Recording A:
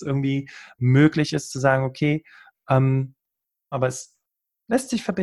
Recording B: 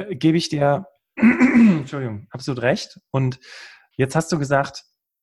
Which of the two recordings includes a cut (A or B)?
A